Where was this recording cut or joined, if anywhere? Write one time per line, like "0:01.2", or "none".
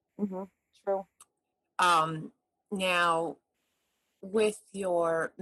none